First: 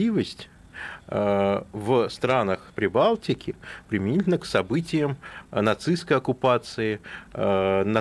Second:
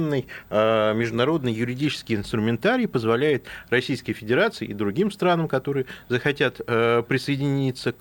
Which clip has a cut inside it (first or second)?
first